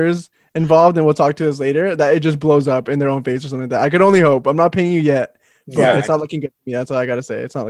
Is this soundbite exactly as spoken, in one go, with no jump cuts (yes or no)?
yes